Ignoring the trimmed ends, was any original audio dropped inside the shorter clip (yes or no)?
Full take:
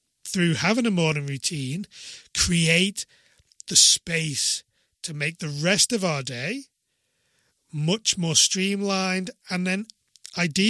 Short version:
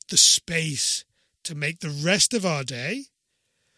no